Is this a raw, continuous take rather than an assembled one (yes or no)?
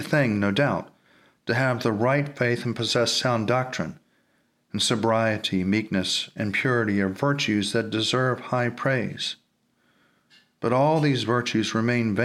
yes